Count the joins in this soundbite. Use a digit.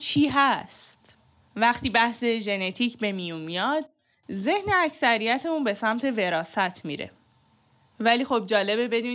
1